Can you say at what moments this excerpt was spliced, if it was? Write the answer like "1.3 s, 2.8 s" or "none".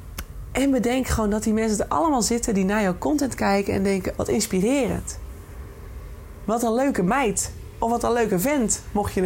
4.2 s